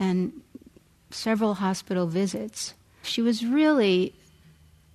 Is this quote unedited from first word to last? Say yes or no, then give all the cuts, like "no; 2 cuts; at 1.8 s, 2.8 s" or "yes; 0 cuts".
no; 1 cut; at 3.0 s